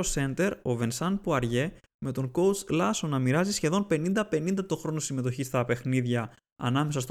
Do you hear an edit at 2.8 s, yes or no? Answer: no